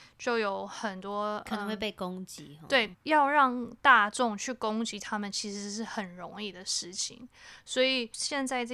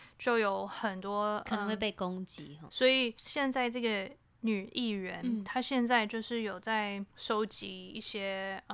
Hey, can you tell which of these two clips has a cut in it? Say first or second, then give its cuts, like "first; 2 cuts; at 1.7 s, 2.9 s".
second; 2 cuts; at 2.7 s, 7.1 s